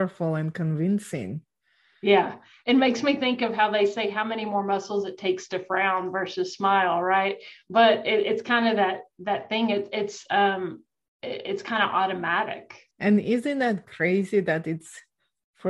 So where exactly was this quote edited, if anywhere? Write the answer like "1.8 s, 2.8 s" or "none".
12.9 s

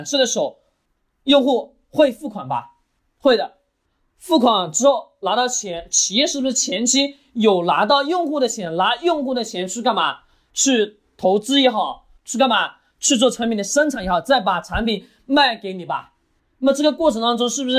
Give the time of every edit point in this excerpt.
12.2 s

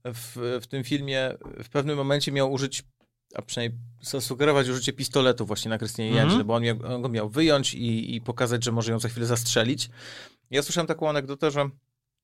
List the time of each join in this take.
10.4 s

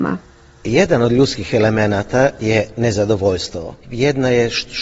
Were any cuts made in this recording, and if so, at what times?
3.8 s

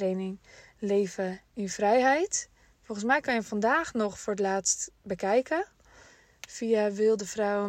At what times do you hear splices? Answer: none

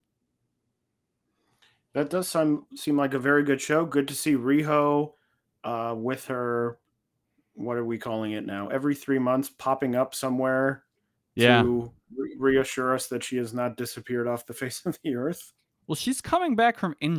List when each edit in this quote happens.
none

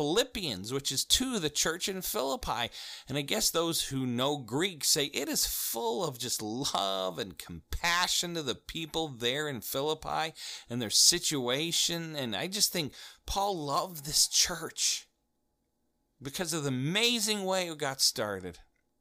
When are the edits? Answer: none

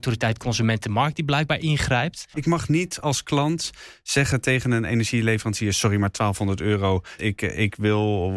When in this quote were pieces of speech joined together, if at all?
2.3 s, 7.2 s

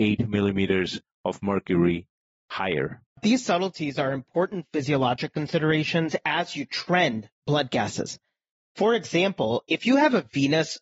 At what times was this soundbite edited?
3.2 s

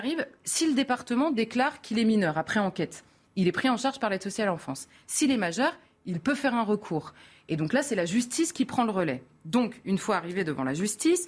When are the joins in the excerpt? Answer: none

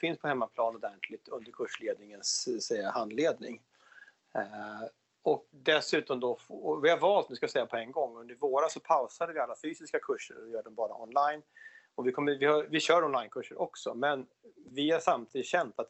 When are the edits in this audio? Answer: 5.5 s

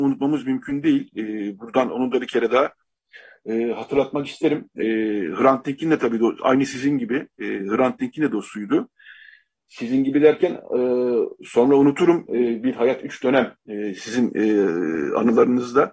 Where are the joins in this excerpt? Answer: 12.3 s

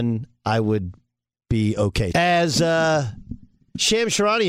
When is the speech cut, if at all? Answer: 2.1 s

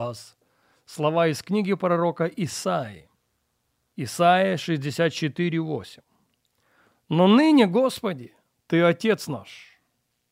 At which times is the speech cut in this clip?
none

